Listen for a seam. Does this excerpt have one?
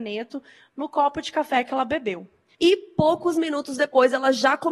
yes; 1 cut; at 2.5 s

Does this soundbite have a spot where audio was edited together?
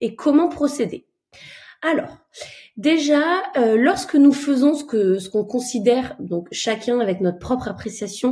no; 0 cuts

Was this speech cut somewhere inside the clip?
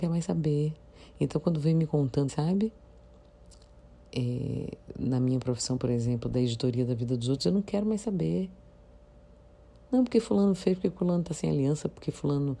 yes; 1 cut; at 2.3 s

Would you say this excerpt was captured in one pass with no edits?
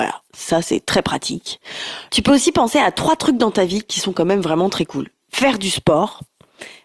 no; 2 cuts; at 2.1 s, 5.2 s

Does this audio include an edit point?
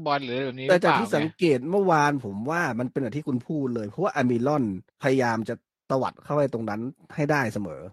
yes; 1 cut; at 4.9 s

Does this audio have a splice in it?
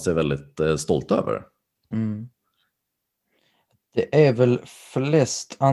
yes; 1 cut; at 1.9 s

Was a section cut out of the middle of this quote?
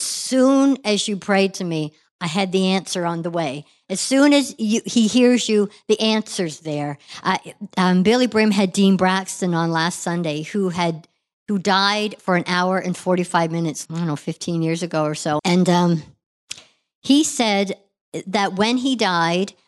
yes; 2 cuts; at 13.9 s, 15.4 s

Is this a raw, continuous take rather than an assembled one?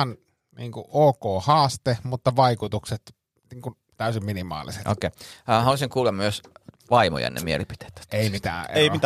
yes; 0 cuts

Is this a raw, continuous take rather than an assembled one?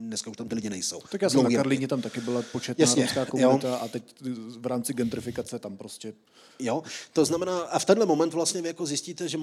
yes; 0 cuts

